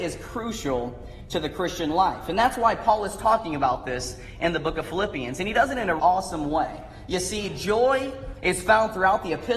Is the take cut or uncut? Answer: cut